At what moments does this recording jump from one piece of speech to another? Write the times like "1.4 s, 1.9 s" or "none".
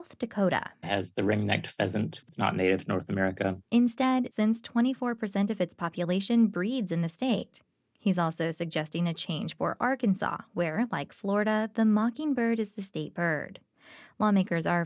4.3 s

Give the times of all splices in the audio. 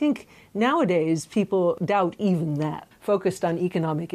2.9 s

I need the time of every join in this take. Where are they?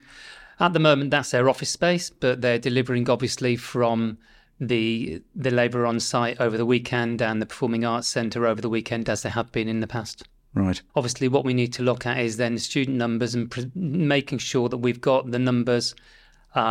10.9 s

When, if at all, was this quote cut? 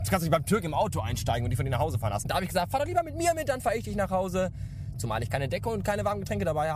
2.2 s, 4.9 s

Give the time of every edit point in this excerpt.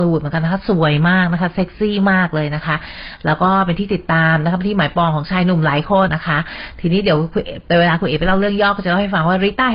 6.1 s

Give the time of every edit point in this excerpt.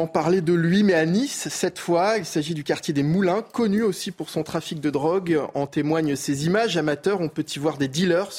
none

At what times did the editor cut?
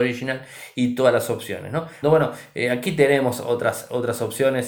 2.0 s

